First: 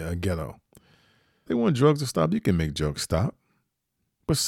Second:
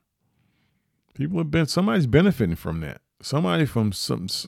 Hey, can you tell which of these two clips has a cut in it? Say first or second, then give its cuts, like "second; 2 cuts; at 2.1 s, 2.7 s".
first; 1 cut; at 1.5 s